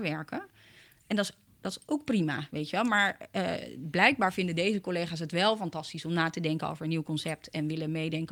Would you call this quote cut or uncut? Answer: uncut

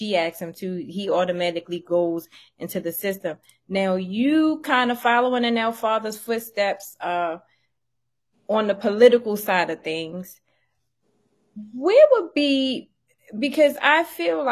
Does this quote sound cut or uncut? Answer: uncut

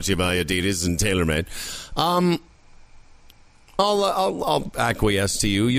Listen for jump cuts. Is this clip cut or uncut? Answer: uncut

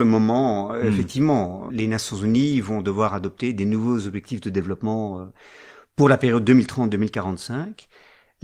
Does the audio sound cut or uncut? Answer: cut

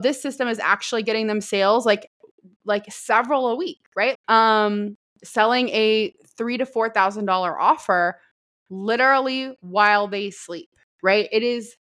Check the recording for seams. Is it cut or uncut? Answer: cut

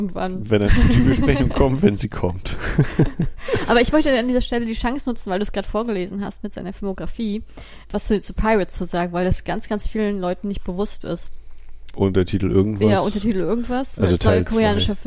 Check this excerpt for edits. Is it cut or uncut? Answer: cut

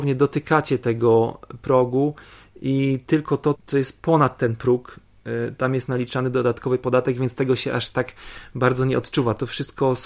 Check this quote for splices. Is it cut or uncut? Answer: cut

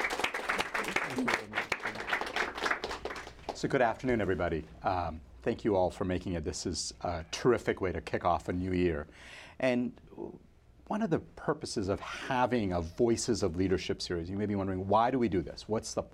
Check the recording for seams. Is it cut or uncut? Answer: uncut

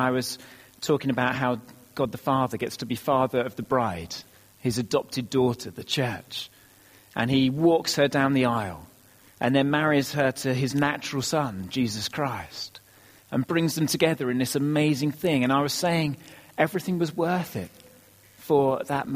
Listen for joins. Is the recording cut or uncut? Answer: uncut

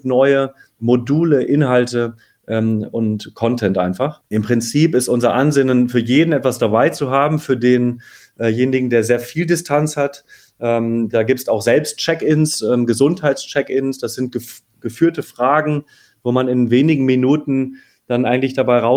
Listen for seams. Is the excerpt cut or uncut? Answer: uncut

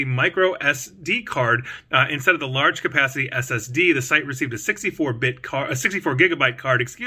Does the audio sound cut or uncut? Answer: uncut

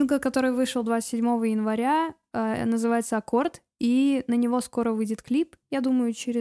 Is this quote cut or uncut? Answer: uncut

